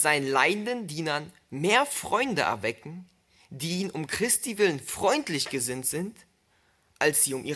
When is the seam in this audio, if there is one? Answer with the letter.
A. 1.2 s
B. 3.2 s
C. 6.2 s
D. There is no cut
D